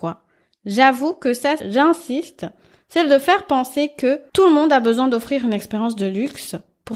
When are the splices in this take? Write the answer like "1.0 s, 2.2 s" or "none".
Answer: 1.6 s